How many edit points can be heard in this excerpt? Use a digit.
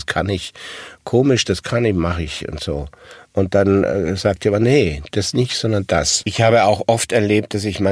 1